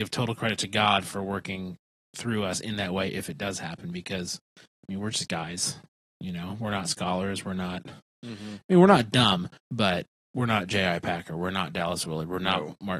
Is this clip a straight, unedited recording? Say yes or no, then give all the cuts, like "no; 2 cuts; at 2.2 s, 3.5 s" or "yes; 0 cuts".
yes; 0 cuts